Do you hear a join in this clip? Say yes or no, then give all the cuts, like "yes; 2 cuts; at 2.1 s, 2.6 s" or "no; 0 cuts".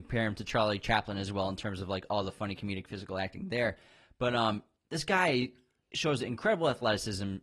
no; 0 cuts